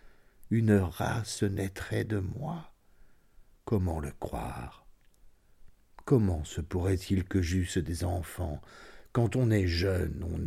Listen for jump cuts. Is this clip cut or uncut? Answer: uncut